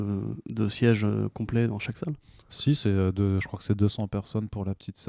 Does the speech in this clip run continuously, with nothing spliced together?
yes; 0 cuts

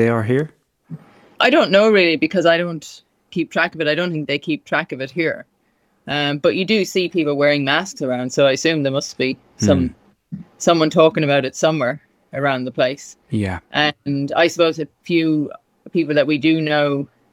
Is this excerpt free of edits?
yes; 0 cuts

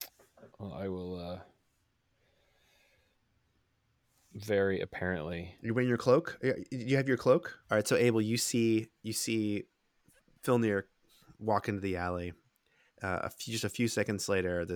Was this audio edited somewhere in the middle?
yes; 2 cuts; at 7.6 s, 12.9 s

